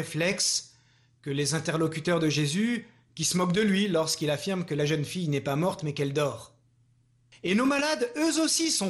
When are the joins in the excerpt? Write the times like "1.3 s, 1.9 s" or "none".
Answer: 7.3 s